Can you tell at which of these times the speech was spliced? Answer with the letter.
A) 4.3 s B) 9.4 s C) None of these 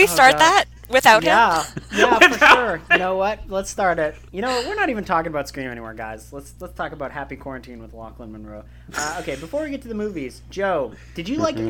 A